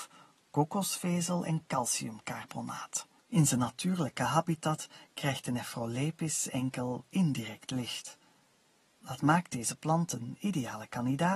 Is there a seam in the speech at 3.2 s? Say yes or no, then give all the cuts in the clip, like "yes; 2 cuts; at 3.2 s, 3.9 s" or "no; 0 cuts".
yes; 1 cut; at 3.2 s